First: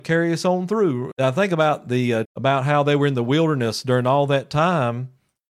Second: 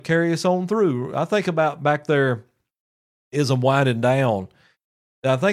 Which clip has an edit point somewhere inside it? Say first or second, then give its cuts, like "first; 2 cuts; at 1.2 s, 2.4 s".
first; 2 cuts; at 1.1 s, 2.2 s